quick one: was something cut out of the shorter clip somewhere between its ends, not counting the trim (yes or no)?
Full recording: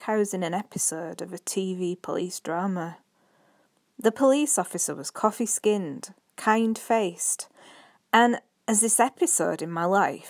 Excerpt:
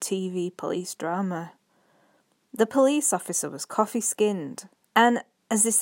yes